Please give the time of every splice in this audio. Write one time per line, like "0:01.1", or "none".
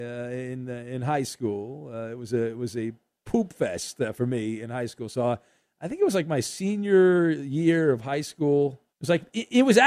0:08.9